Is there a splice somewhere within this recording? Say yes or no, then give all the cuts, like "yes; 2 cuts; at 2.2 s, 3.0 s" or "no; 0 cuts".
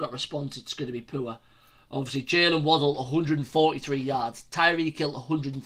no; 0 cuts